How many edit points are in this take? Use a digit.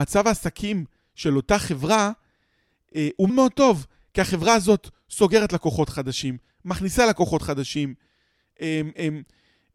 1